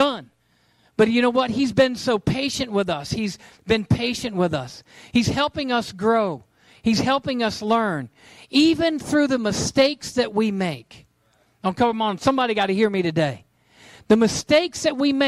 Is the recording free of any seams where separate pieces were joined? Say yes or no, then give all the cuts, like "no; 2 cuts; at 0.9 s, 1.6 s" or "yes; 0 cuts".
yes; 0 cuts